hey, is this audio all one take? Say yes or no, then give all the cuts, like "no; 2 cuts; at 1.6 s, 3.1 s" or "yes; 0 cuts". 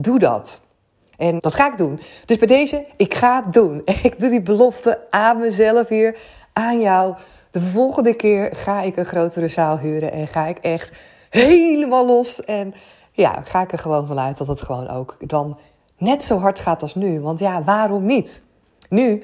no; 1 cut; at 1.4 s